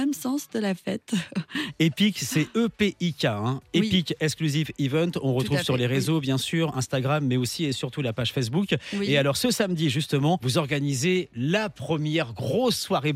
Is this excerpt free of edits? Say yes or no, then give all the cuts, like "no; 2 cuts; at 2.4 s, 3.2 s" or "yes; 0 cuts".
yes; 0 cuts